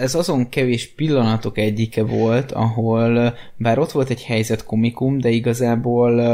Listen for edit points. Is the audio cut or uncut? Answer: uncut